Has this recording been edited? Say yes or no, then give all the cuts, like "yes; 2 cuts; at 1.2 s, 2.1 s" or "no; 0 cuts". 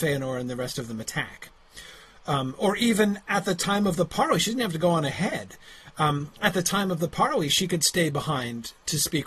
no; 0 cuts